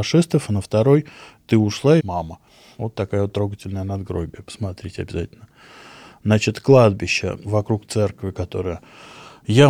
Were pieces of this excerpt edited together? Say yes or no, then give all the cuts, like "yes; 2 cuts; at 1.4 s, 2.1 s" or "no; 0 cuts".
yes; 1 cut; at 2.0 s